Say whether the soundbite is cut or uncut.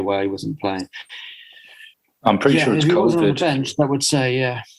uncut